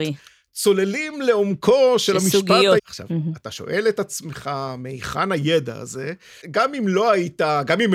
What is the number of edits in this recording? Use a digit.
2